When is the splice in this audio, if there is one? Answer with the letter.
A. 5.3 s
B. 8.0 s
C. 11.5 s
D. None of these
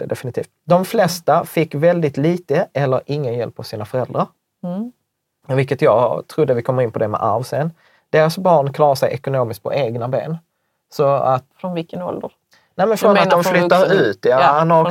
C